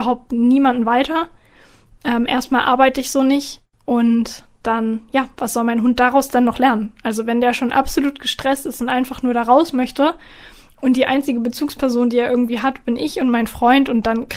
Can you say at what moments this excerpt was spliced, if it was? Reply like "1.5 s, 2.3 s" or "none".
none